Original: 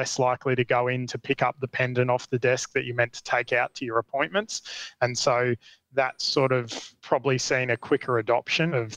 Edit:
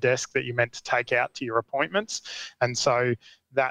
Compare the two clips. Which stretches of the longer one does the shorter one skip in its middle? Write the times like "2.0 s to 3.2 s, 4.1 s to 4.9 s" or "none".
none